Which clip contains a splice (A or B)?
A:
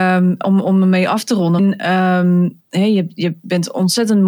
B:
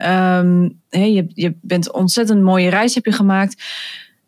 A